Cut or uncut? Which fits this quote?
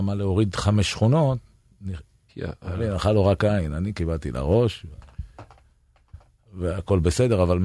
cut